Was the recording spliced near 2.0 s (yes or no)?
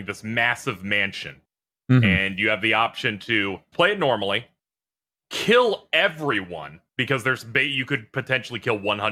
no